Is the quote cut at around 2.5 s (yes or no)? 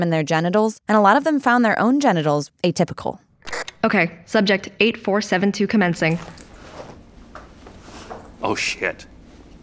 yes